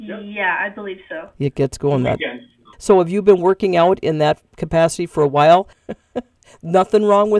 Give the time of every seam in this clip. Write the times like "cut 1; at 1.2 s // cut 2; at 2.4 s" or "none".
cut 1; at 2.7 s // cut 2; at 5.7 s